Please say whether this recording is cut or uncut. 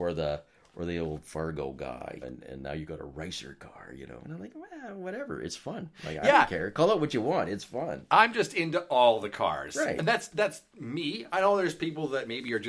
cut